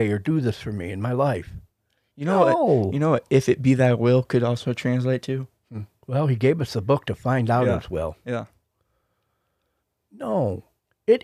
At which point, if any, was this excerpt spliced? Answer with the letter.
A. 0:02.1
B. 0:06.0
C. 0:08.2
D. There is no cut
B